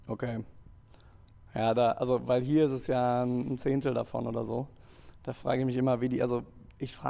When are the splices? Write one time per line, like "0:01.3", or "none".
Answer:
none